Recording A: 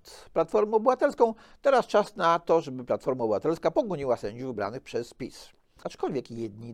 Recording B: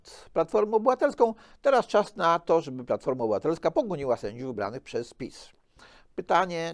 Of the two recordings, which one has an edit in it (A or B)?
A